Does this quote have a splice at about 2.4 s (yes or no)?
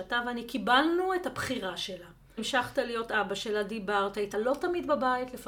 yes